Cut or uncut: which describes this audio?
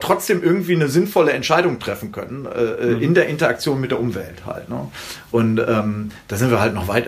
uncut